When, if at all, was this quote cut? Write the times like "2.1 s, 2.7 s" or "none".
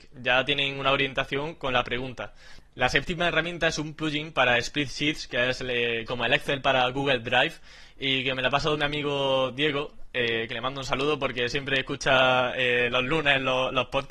none